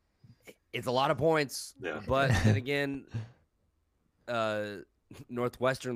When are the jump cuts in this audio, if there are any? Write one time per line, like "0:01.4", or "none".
none